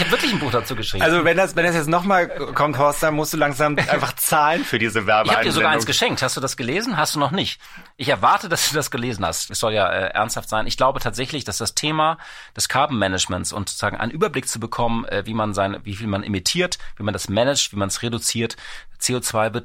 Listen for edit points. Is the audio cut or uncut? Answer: cut